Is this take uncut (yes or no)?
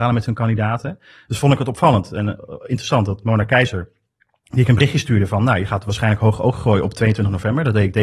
yes